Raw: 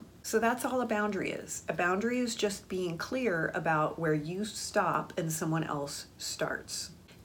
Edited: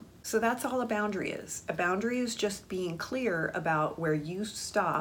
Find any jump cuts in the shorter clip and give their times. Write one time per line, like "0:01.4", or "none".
none